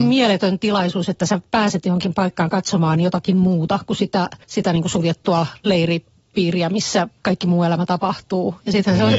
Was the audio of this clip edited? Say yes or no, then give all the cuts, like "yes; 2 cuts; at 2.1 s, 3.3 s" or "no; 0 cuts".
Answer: yes; 2 cuts; at 4.4 s, 7.2 s